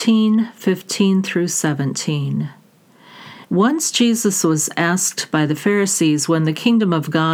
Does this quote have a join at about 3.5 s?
yes; 1 cut; at 3.5 s

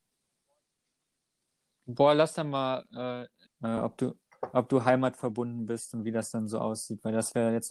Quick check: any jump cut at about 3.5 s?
yes; 1 cut; at 3.5 s

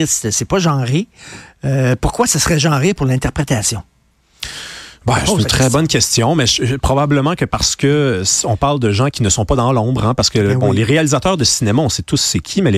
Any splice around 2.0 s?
no; 1 cut; at 9.1 s

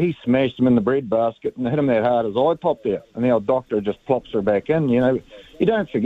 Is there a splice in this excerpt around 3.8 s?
no; 0 cuts

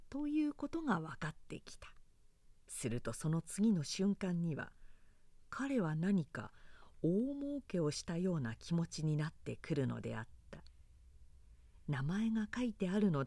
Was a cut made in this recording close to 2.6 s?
yes; 1 cut; at 2.6 s

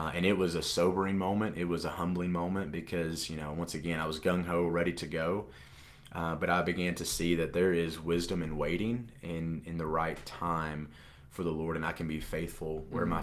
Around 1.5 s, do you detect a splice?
no; 0 cuts

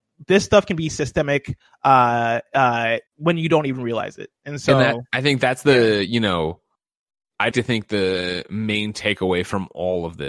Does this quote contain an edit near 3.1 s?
yes; 2 cuts; at 3.1 s, 7.5 s

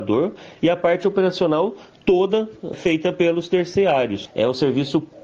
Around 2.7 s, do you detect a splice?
yes; 2 cuts; at 2.7 s, 4.3 s

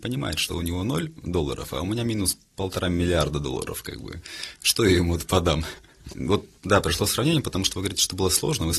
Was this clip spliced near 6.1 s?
yes; 1 cut; at 6.1 s

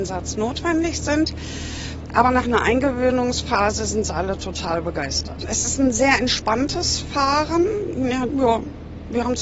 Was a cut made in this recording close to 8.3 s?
yes; 1 cut; at 8.3 s

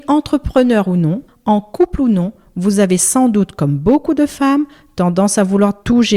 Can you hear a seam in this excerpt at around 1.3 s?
yes; 1 cut; at 1.3 s

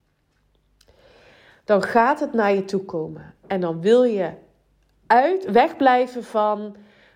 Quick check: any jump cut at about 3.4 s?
no; 0 cuts

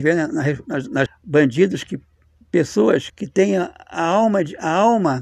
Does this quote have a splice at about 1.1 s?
yes; 2 cuts; at 1.1 s, 3.1 s

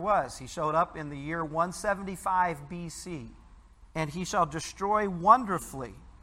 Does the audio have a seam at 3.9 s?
yes; 1 cut; at 3.9 s

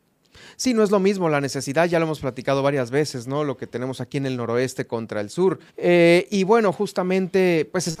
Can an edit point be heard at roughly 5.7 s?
yes; 1 cut; at 5.7 s

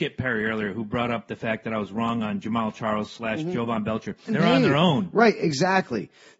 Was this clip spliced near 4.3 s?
yes; 1 cut; at 4.3 s

